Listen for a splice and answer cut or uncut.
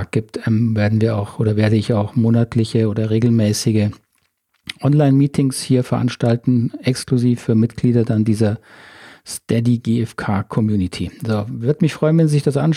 uncut